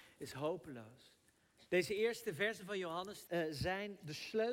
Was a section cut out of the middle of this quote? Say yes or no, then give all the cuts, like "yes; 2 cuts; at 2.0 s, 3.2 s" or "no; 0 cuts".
yes; 2 cuts; at 1.7 s, 3.3 s